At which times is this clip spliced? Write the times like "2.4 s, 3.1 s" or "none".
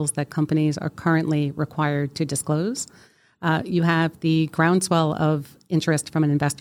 none

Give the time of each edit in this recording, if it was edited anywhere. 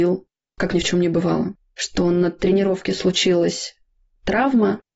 none

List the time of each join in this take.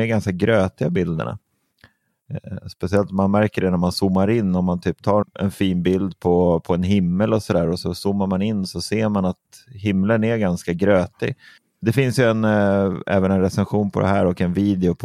5.2 s

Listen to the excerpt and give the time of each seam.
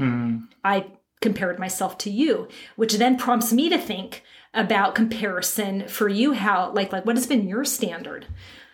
6.9 s

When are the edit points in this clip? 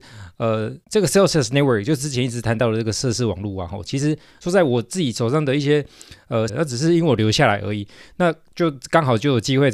4.4 s, 6.5 s

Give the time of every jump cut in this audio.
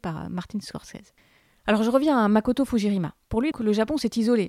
3.5 s

